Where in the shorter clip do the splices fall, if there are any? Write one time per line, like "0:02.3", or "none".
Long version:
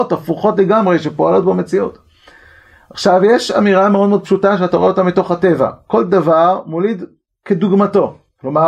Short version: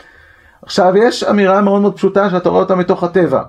none